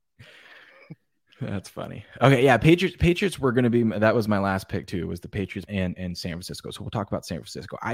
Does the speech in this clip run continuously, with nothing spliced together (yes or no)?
no